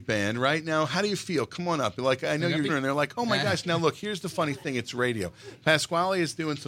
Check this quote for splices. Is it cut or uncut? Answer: cut